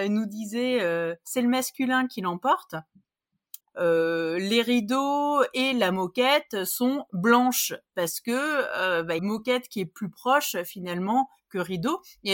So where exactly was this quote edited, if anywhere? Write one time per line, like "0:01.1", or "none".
0:03.6
0:09.2